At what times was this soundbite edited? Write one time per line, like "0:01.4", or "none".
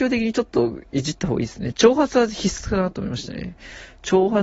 none